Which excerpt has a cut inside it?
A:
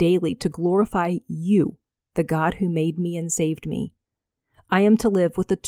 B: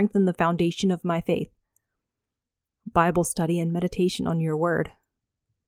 B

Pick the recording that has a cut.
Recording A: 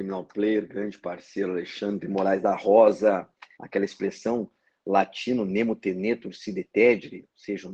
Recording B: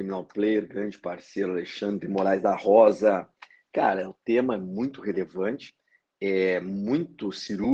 A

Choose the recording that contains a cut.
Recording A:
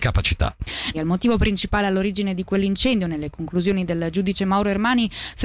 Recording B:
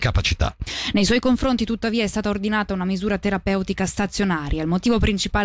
A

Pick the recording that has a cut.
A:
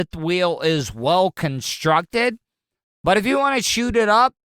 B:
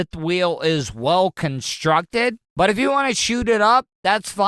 B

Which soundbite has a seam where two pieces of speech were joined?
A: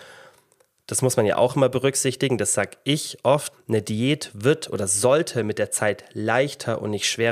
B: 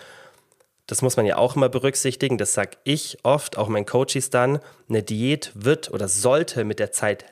A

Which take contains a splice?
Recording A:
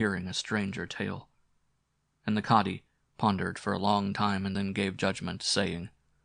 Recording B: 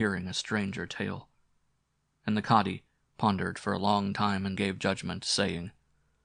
B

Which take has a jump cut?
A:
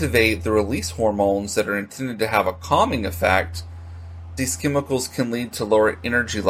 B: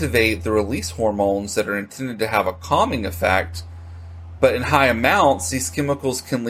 A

